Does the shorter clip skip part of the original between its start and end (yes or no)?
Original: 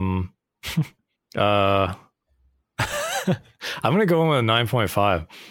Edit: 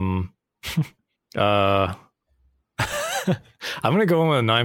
no